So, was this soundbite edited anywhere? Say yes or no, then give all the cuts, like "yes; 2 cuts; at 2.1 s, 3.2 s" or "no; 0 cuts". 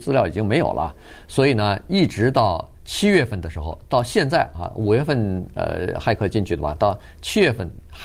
yes; 2 cuts; at 1.2 s, 2.8 s